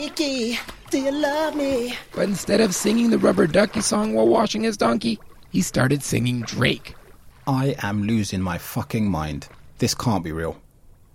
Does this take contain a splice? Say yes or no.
yes